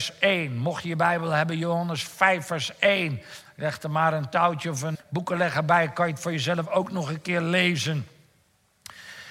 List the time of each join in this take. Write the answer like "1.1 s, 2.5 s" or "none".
4.9 s